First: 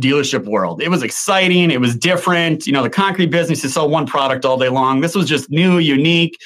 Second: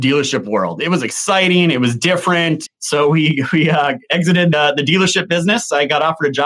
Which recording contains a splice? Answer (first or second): second